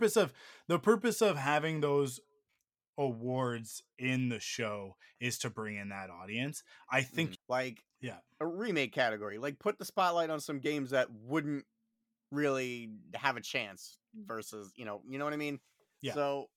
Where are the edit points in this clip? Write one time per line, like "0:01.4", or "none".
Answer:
0:07.3